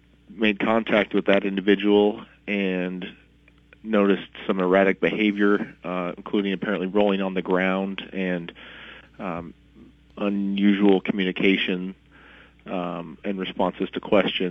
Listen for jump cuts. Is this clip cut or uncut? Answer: uncut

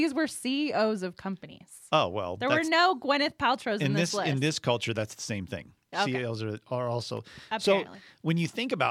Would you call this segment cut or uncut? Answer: uncut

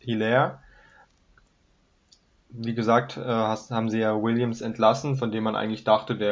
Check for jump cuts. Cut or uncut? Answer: uncut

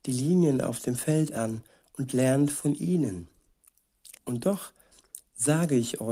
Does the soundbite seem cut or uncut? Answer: cut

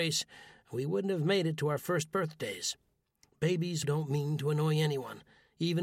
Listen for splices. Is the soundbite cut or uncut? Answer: cut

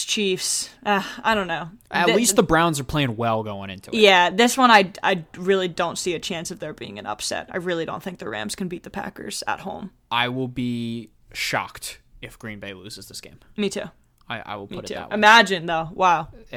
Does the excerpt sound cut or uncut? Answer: uncut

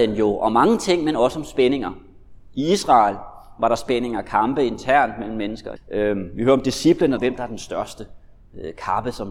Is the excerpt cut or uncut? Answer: cut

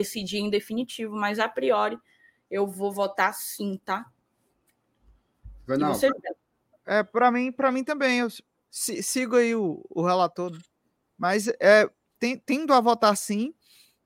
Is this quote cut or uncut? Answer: uncut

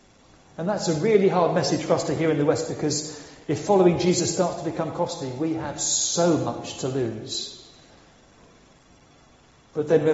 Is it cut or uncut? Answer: uncut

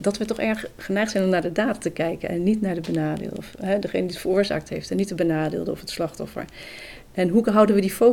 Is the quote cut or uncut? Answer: uncut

